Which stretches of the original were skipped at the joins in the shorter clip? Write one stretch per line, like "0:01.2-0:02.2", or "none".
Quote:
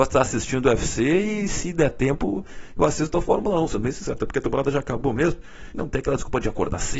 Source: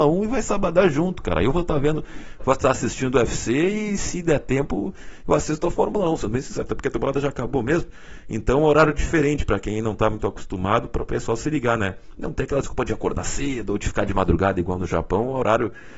0:08.2-0:12.2